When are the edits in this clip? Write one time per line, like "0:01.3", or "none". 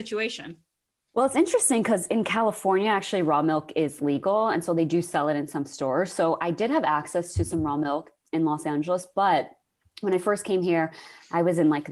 none

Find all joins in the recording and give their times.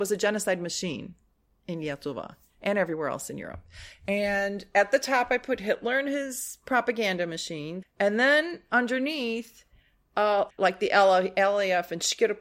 0:07.8
0:10.5

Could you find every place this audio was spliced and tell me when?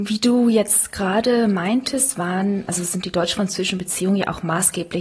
none

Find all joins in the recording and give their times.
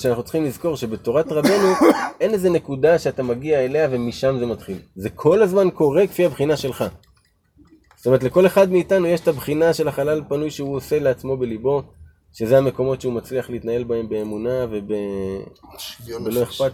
none

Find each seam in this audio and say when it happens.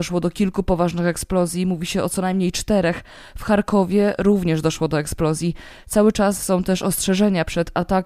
none

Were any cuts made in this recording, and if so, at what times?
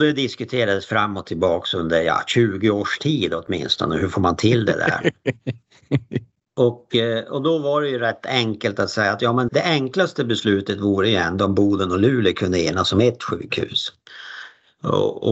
0:09.5

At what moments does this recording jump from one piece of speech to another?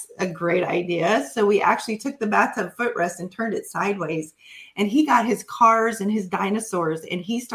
none

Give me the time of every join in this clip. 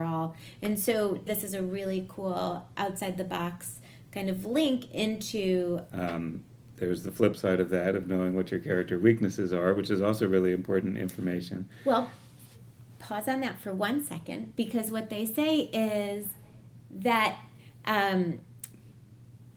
0:01.3
0:05.9

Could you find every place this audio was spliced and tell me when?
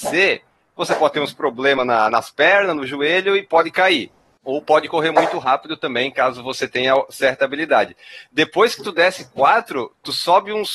none

